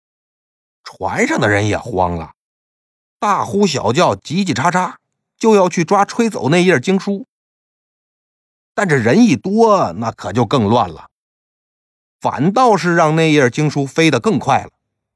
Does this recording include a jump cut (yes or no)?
no